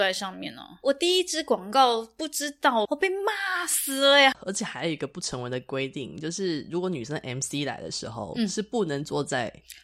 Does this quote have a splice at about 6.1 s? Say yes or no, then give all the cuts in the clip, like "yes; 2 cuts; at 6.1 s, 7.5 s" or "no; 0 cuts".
no; 2 cuts; at 2.8 s, 4.3 s